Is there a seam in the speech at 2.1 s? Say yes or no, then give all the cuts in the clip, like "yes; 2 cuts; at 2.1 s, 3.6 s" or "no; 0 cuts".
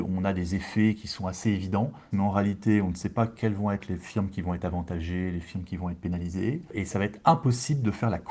yes; 1 cut; at 2.1 s